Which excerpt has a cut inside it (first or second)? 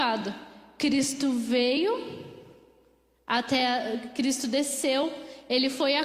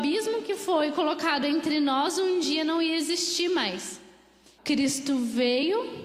second